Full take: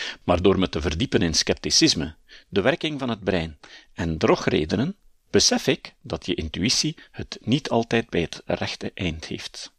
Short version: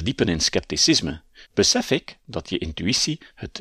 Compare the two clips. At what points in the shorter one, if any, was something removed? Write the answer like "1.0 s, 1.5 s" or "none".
1.4 s